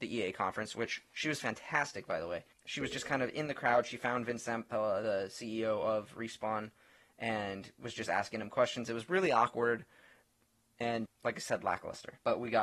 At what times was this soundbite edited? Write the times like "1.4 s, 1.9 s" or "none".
11.1 s